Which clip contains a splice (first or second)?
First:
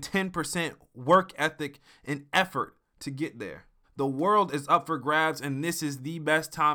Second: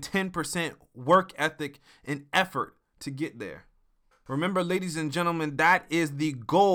first